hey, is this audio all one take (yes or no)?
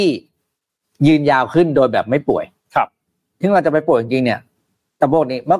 yes